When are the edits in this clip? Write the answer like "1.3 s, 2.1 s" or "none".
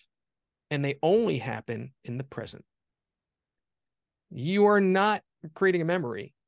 none